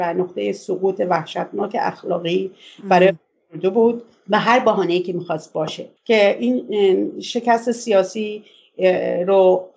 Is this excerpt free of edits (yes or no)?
no